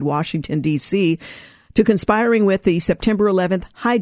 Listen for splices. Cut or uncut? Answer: uncut